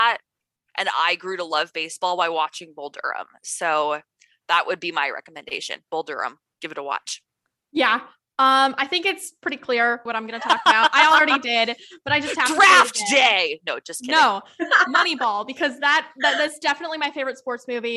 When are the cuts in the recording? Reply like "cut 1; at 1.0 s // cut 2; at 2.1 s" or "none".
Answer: cut 1; at 10.1 s